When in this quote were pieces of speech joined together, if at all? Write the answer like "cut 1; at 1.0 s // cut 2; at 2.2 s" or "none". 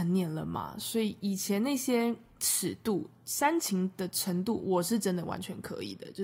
none